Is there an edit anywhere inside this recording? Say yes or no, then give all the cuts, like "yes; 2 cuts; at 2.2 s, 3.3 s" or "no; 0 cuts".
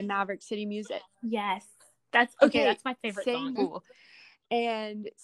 yes; 2 cuts; at 1.1 s, 3.6 s